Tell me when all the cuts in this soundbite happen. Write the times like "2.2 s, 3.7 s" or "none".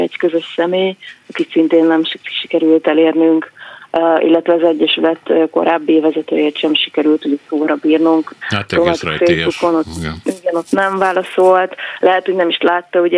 8.4 s